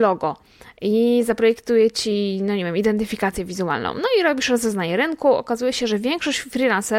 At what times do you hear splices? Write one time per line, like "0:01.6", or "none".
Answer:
none